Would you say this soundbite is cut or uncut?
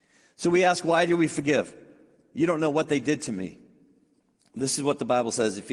cut